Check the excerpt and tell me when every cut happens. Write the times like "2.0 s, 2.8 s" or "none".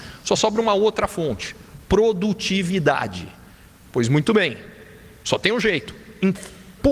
none